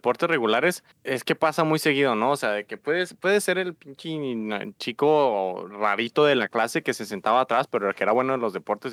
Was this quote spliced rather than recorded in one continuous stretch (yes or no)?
yes